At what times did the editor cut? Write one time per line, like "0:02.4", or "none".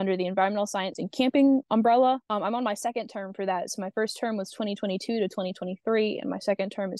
0:00.9